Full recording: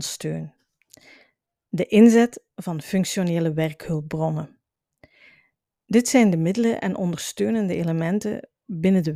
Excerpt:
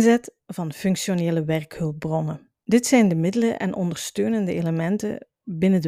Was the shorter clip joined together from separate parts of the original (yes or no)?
yes